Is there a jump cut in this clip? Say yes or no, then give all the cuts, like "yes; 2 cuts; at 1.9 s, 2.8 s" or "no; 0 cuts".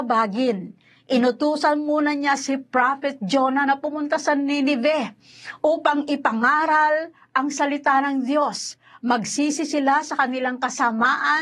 no; 0 cuts